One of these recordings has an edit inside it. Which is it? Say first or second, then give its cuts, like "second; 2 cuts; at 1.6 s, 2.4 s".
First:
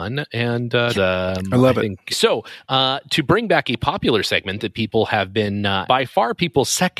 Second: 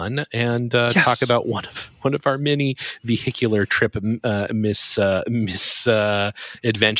first; 3 cuts; at 0.9 s, 2.1 s, 5.9 s